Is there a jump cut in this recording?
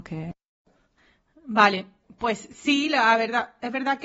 no; 0 cuts

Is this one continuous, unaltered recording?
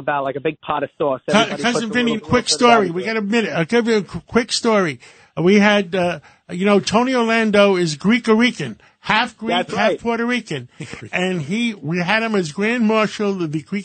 no; 1 cut; at 2.2 s

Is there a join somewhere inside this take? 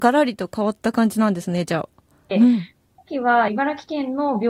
yes; 2 cuts; at 2.3 s, 3.5 s

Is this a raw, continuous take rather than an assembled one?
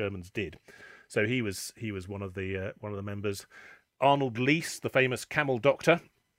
yes; 0 cuts

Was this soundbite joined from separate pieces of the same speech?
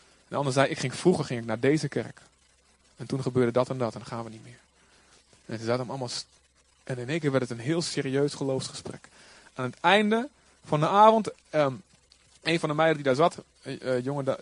no; 0 cuts

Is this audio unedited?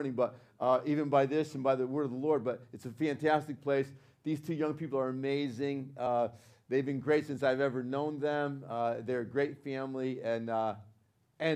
yes; 0 cuts

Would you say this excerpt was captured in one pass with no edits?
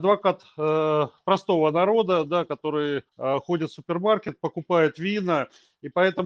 no; 1 cut; at 3.1 s

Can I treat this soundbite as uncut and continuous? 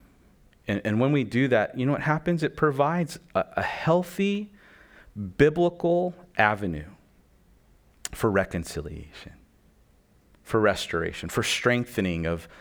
yes; 0 cuts

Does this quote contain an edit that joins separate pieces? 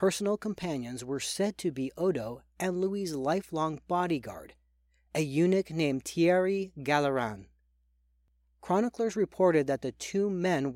no; 0 cuts

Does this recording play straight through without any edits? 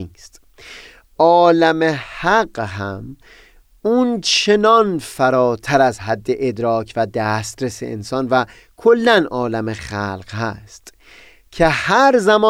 yes; 0 cuts

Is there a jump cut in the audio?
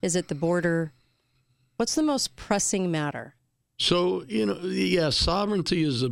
yes; 1 cut; at 3.6 s

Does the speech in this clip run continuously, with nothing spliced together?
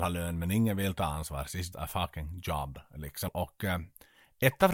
no; 2 cuts; at 1.7 s, 3.3 s

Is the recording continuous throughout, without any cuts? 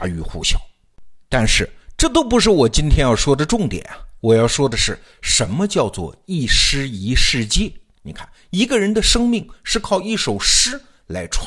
no; 1 cut; at 8.0 s

